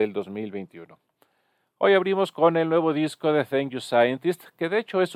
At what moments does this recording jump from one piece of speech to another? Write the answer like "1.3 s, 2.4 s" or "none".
none

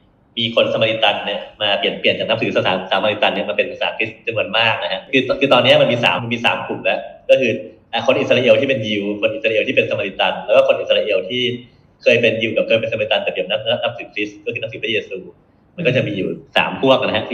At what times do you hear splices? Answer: 6.2 s

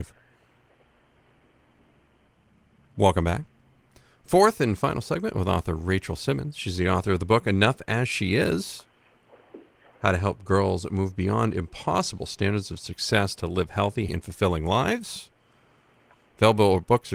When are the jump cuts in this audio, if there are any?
14.1 s

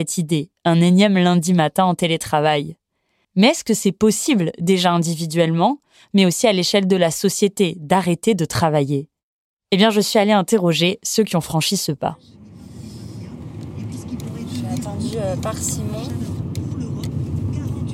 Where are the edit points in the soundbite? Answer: 3.2 s

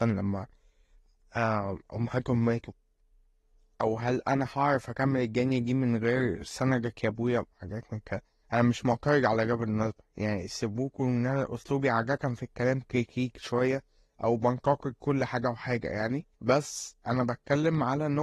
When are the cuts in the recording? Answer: 8.4 s, 16.3 s

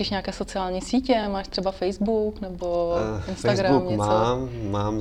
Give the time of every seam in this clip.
none

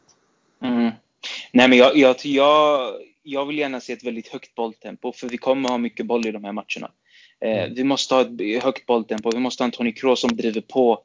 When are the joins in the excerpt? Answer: none

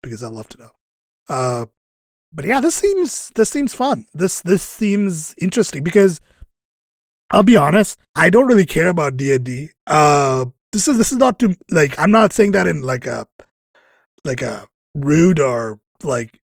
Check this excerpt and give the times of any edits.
8.0 s

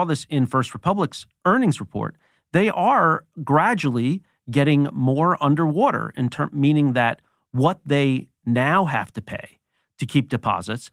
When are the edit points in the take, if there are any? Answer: none

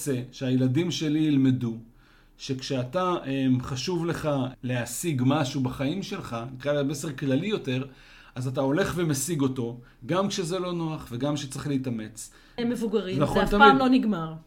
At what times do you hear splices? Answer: 12.6 s

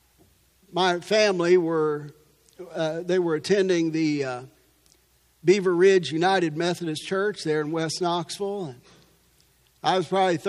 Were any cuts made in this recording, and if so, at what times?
none

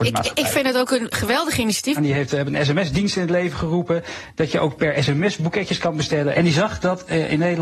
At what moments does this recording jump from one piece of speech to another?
2.0 s, 6.3 s

